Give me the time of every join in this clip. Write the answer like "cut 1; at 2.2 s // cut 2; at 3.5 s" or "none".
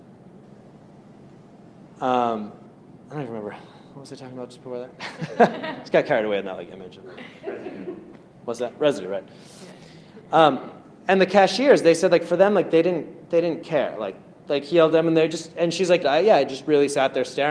cut 1; at 3.0 s // cut 2; at 16.0 s